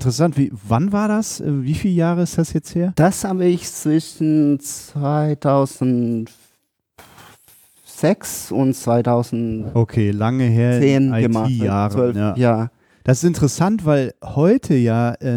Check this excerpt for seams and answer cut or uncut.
uncut